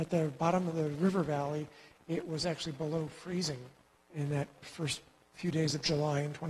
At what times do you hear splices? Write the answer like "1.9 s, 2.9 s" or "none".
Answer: 4.6 s